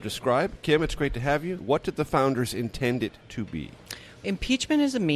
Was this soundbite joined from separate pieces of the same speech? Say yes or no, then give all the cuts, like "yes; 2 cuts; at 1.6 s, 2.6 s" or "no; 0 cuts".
yes; 1 cut; at 1.6 s